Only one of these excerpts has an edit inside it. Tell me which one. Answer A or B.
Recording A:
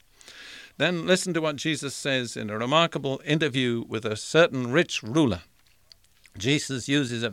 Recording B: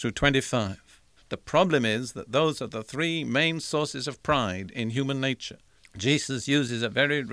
B